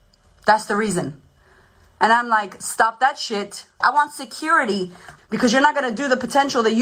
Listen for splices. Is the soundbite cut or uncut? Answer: cut